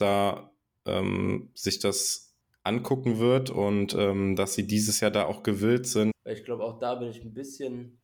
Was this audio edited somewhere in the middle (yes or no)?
yes